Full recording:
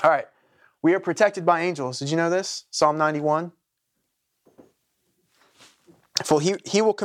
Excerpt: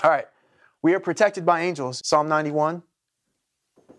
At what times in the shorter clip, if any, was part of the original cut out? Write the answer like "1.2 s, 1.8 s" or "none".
2.0 s